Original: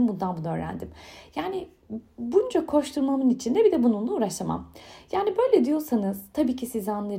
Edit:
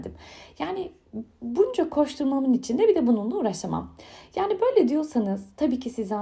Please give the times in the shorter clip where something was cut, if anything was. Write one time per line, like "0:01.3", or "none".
none